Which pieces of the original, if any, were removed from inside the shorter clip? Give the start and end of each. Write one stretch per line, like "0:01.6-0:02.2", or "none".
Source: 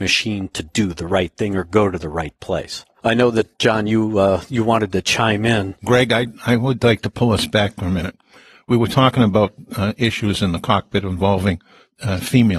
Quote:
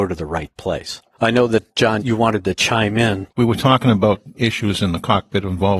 0:03.8-0:04.5
0:05.8-0:08.6
0:09.7-0:10.0